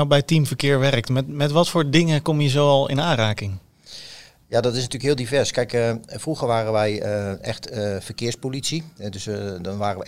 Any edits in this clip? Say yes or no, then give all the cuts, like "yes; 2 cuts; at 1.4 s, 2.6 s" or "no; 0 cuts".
no; 0 cuts